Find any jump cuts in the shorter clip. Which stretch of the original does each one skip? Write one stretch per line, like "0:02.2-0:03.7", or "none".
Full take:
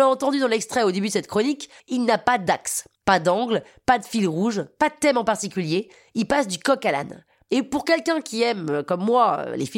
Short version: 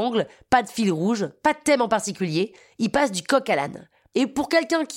none